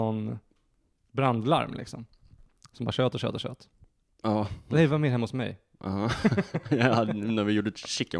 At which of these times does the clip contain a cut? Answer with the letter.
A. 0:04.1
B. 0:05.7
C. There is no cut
A